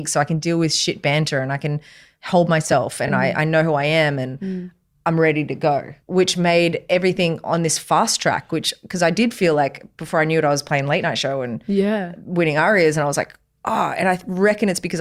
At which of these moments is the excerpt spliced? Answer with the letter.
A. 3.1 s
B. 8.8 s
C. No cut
C